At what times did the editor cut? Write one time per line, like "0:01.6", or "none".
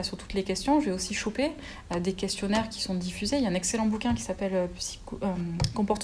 none

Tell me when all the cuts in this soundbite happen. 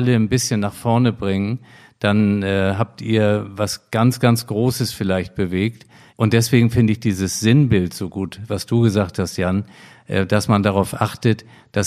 0:06.1

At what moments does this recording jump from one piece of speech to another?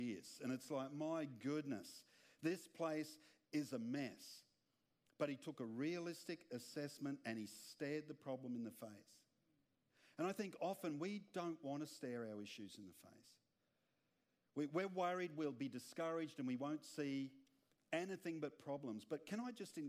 none

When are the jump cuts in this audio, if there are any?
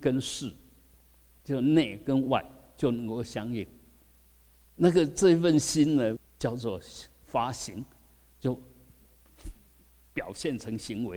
0:04.6
0:06.2

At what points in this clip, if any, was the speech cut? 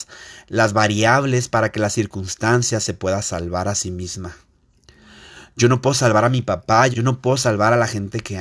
0:06.9

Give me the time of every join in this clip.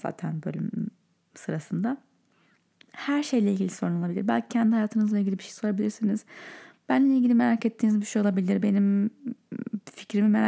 none

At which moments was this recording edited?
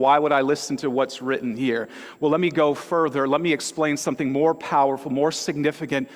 none

